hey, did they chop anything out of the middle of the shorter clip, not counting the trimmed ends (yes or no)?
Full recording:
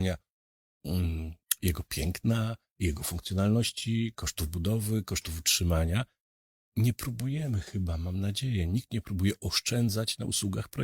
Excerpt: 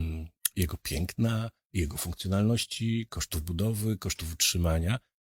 no